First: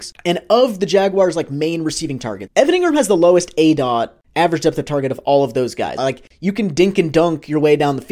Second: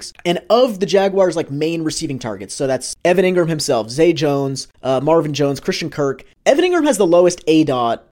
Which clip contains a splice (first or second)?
first